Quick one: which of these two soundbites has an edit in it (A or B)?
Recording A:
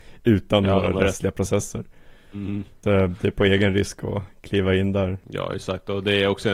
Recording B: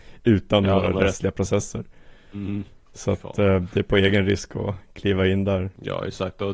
A